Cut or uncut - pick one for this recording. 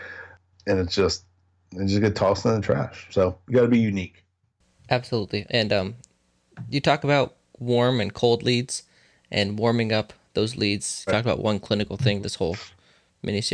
cut